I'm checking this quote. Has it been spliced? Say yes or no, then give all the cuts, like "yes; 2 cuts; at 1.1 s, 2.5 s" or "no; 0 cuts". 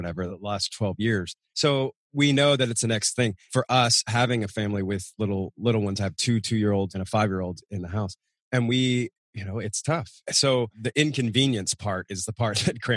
yes; 1 cut; at 1.5 s